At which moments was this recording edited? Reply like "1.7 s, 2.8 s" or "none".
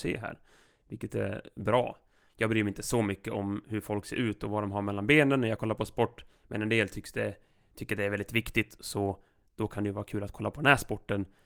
none